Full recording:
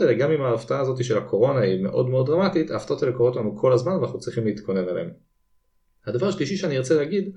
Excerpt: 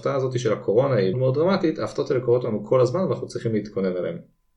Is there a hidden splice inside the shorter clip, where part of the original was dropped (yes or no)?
yes